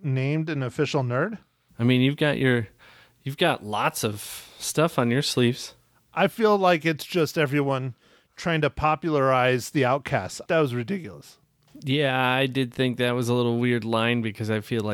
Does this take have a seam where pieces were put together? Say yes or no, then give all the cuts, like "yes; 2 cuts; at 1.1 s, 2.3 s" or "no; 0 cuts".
yes; 2 cuts; at 1.7 s, 10.5 s